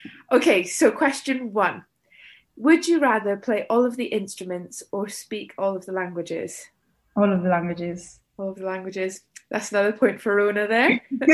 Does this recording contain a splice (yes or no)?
no